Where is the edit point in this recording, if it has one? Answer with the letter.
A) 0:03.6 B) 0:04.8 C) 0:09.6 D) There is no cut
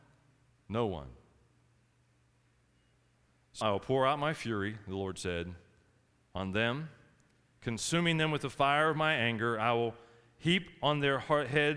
A